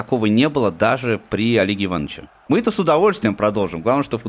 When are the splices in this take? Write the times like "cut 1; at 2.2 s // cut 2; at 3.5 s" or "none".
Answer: cut 1; at 2.5 s